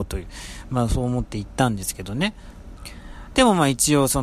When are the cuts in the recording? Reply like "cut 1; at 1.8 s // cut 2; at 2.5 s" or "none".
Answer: none